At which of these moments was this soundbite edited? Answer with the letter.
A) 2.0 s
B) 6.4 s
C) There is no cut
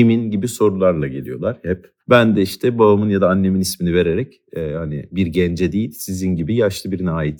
A